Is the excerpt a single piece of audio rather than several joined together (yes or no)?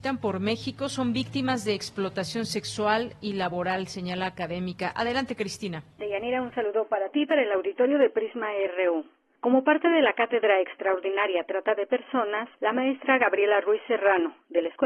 no